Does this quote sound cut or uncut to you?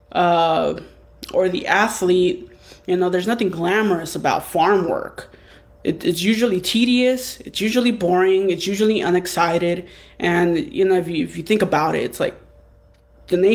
uncut